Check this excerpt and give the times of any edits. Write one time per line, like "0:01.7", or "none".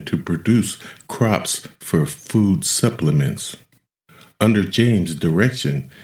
none